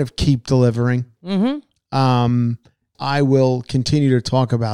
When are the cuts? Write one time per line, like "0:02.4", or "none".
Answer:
0:02.9